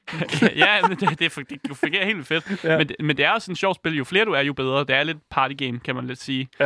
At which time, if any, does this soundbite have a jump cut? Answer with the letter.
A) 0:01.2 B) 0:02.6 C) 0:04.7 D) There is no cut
A